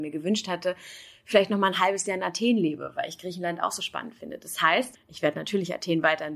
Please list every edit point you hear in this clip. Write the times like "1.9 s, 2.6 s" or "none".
4.9 s